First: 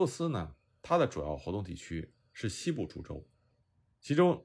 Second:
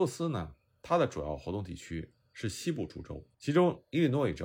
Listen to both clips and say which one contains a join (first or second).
second